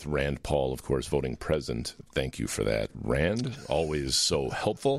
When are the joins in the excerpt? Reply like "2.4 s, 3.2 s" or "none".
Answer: none